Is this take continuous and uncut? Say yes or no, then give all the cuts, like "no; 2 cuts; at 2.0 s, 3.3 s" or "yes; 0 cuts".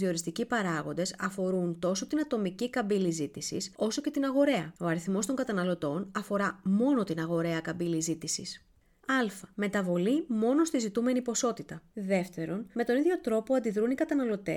no; 2 cuts; at 9.0 s, 11.9 s